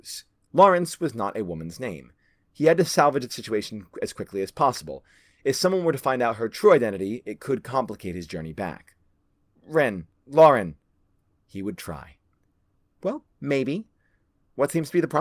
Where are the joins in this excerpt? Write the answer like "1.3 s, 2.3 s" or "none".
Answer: 11.4 s, 13.3 s